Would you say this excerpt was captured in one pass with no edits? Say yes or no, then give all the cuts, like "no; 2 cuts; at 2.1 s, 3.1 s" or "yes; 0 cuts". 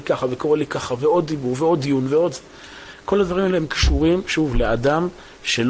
yes; 0 cuts